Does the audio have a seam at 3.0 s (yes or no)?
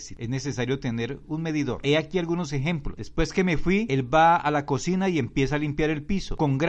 yes